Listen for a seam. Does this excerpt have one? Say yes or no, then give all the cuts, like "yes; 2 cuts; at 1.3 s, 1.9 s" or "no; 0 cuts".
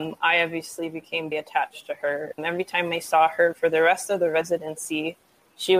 yes; 2 cuts; at 1.3 s, 2.4 s